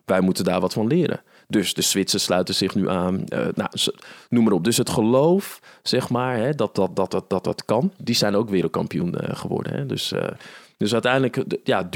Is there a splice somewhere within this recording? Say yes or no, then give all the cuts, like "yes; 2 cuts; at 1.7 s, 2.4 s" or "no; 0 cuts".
yes; 1 cut; at 8.0 s